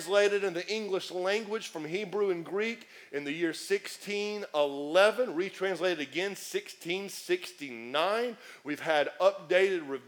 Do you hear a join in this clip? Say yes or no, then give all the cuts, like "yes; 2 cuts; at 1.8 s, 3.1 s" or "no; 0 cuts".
no; 0 cuts